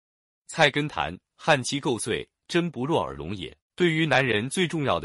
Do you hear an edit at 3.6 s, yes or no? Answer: yes